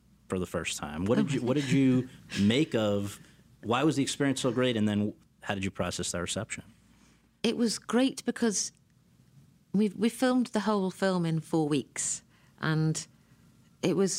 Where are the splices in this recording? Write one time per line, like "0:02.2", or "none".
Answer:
none